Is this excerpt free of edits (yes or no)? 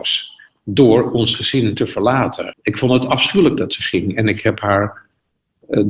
no